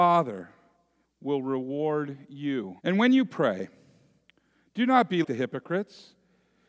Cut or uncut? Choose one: cut